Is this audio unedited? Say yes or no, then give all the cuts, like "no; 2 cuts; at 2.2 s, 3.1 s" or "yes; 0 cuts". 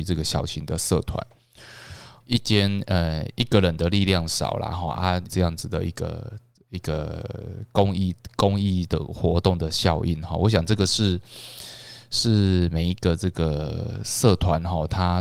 no; 2 cuts; at 2.2 s, 5.3 s